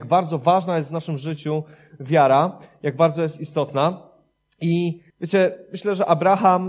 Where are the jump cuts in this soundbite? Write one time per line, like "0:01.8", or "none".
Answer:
0:05.1